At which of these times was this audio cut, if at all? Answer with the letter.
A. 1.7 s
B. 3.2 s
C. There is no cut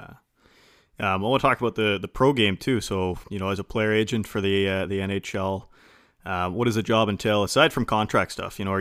B